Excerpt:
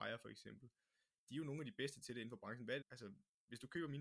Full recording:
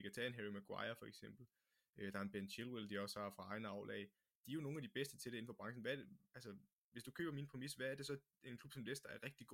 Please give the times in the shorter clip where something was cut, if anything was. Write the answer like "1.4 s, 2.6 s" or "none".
1.1 s, 2.8 s